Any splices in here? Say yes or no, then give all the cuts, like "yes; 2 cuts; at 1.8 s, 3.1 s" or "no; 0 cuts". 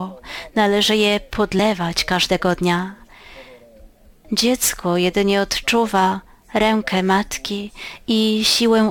yes; 1 cut; at 4.2 s